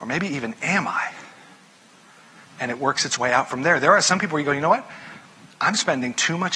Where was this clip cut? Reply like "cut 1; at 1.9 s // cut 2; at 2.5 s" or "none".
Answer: none